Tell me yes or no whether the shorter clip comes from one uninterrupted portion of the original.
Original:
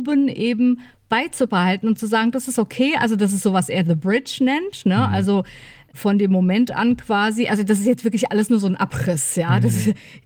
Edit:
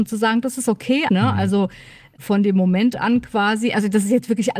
no